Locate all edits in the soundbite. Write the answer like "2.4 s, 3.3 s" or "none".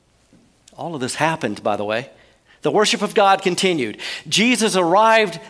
2.5 s